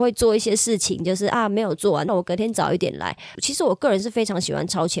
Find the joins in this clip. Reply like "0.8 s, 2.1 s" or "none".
2.1 s, 3.3 s